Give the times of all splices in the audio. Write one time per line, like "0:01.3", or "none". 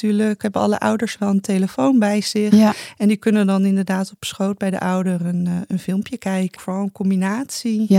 0:06.6